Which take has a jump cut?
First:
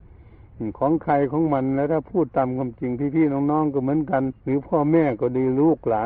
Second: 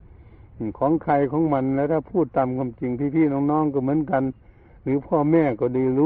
first; 1 cut; at 4.4 s

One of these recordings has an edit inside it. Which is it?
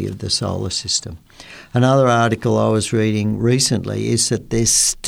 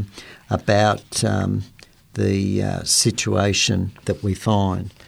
second; 1 cut; at 4.0 s

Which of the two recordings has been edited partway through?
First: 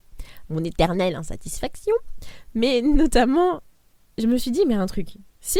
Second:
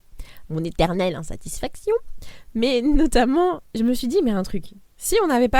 second; 1 cut; at 3.7 s

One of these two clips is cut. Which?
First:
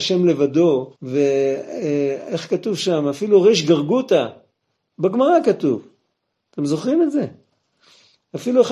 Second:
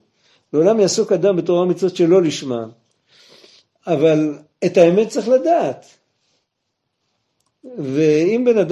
first; 1 cut; at 1.0 s

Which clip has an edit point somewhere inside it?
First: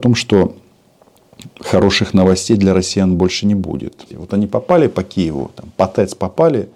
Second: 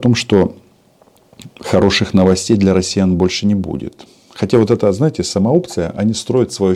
first; 1 cut; at 4.1 s

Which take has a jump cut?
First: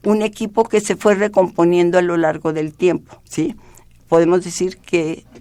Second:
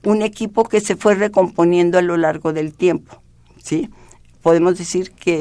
first; 1 cut; at 3.3 s

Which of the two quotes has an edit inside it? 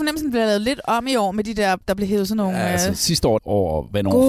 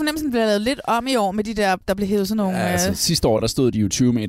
first; 1 cut; at 3.4 s

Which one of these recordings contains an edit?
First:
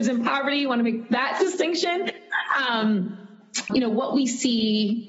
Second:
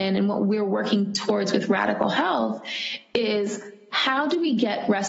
first; 1 cut; at 3.7 s

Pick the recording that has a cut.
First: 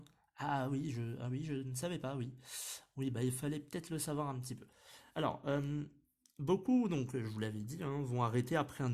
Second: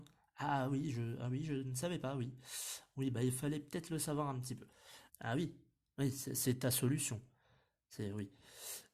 second; 1 cut; at 5.1 s

